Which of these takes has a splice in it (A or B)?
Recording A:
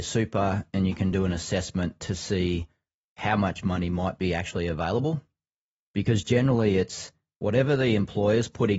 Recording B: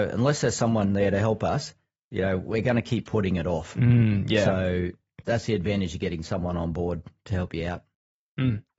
B